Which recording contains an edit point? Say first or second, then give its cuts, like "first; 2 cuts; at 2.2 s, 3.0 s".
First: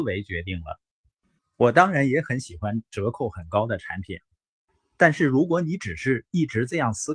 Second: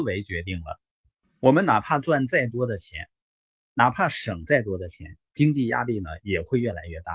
first; 1 cut; at 1.4 s